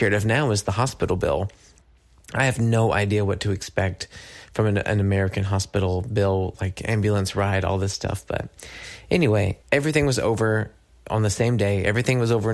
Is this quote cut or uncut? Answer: cut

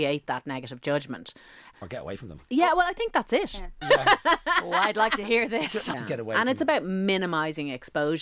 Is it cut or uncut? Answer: cut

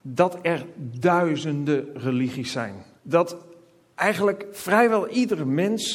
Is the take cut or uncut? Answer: cut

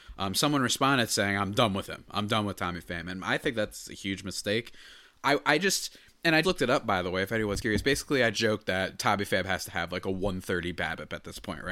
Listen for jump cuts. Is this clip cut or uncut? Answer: cut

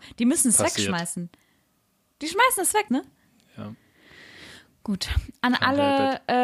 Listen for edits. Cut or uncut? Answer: cut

